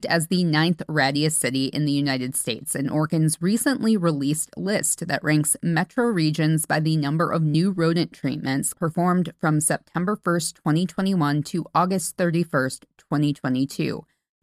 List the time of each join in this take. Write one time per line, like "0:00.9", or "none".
0:08.7

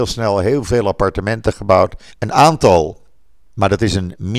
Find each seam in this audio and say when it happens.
0:02.1

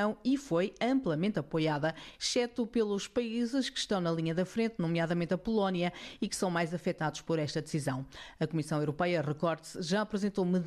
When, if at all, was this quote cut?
none

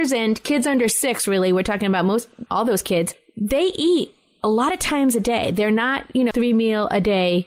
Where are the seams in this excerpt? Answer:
0:02.5
0:06.3

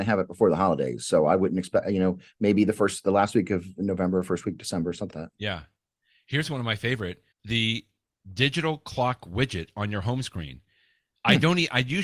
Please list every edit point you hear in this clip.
0:05.1
0:07.3

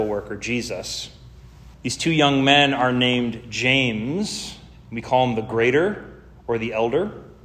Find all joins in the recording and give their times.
0:01.7

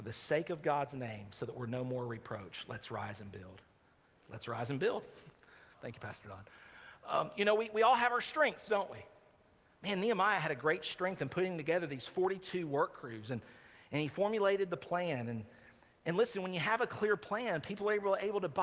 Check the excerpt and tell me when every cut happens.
0:04.1
0:05.7

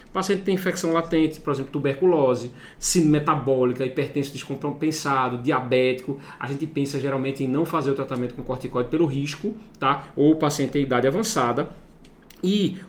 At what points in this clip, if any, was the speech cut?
0:02.7

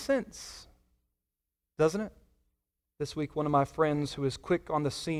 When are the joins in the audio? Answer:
0:02.8

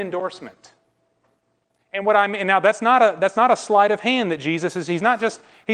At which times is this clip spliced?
none

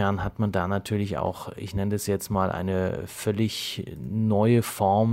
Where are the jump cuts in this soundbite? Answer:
none

